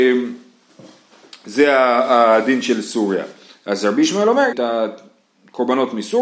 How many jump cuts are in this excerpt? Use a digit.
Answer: 1